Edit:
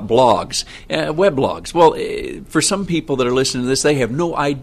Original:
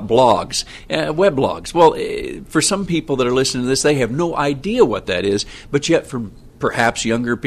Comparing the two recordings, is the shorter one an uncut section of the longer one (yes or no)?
yes